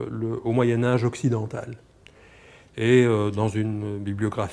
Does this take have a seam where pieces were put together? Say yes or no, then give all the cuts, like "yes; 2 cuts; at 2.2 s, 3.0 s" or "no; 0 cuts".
no; 0 cuts